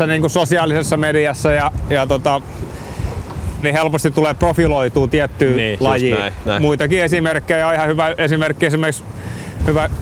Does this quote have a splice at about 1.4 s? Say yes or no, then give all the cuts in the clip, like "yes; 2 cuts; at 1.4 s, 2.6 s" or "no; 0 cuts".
no; 2 cuts; at 3.6 s, 6.4 s